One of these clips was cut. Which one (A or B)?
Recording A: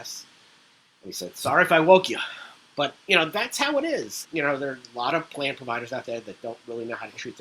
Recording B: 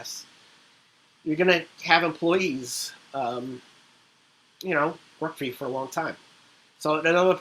A